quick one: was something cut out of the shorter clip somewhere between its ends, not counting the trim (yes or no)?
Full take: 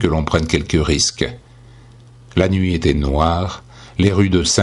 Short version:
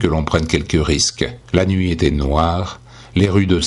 yes